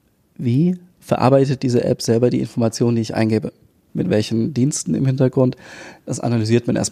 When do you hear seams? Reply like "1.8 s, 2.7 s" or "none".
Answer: 3.9 s

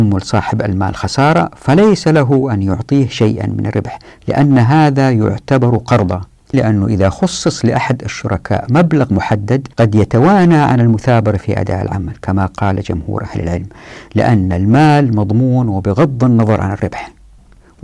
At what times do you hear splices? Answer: 6.5 s, 9.7 s

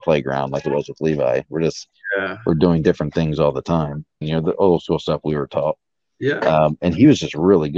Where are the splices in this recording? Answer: 4.2 s

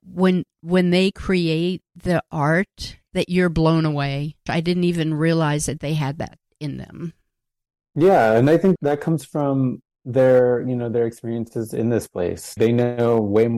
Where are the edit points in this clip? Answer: 4.5 s, 8.8 s, 12.6 s

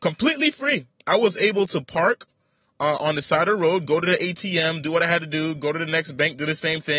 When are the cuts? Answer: none

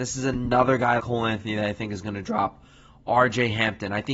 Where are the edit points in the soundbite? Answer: 1.0 s

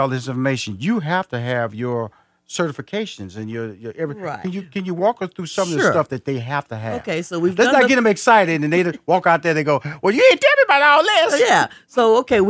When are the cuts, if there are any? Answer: none

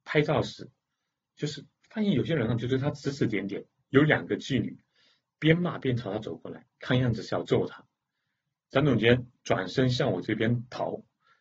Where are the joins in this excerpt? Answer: none

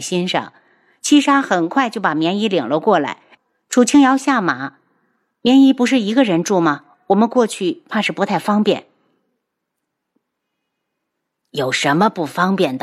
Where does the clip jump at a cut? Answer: 3.4 s

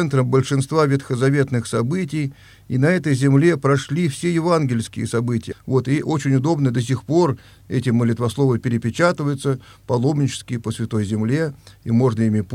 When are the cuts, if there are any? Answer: 5.5 s

